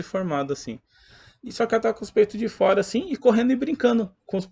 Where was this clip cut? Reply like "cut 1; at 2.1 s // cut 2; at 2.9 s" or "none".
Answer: none